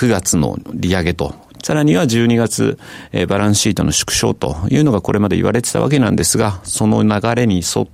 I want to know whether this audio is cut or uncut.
cut